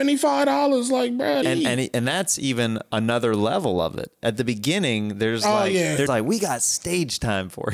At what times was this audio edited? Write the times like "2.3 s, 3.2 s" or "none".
1.4 s, 6.1 s